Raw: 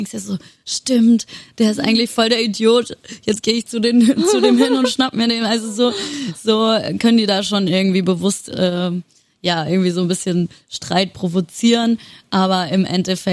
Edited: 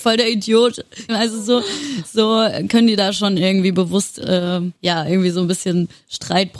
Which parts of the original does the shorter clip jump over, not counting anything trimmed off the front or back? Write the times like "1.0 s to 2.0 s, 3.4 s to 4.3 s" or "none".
3.2 s to 5.4 s, 9.1 s to 9.4 s